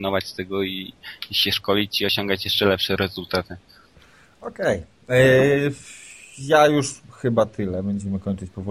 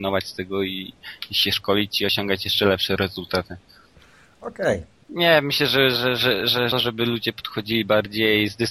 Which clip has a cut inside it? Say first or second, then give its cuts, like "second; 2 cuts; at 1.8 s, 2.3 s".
second; 2 cuts; at 5.0 s, 6.7 s